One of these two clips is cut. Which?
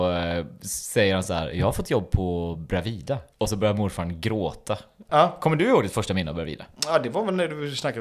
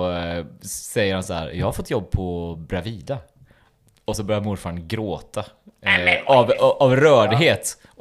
first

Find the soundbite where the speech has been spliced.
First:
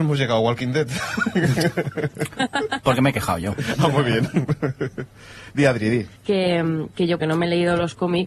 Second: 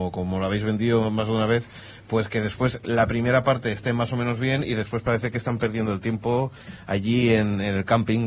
first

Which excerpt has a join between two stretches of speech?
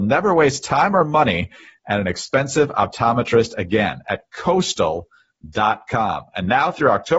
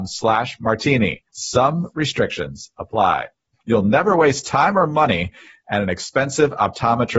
second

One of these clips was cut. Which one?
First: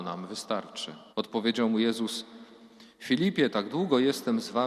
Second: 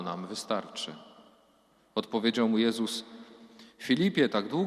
first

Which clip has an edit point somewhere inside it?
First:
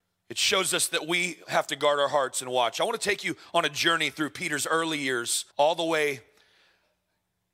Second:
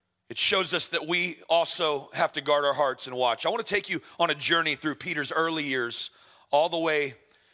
first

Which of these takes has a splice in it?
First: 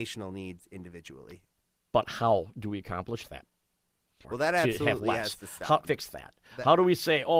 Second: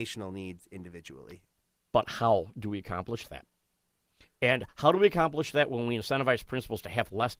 first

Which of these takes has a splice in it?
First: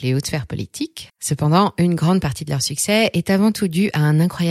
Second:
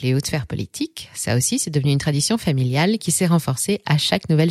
first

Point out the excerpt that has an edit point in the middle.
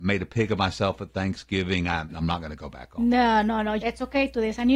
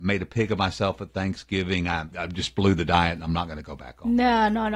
first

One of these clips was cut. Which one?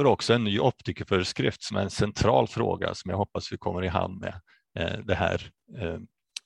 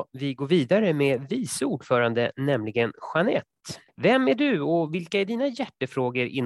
second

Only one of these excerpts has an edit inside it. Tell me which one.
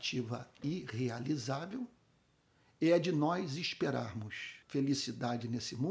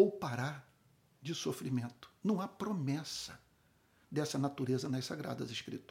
first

